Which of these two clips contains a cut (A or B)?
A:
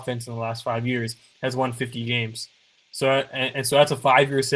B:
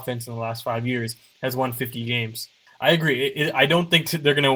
B